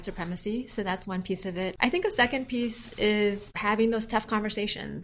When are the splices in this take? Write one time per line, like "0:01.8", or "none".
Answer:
none